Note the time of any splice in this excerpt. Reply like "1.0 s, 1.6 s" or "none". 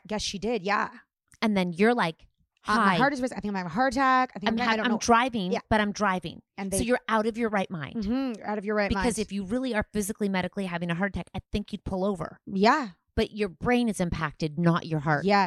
none